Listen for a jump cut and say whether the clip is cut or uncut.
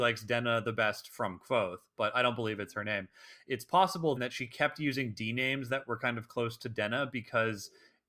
cut